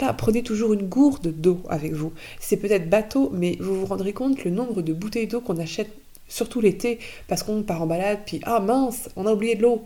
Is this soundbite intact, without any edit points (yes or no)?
yes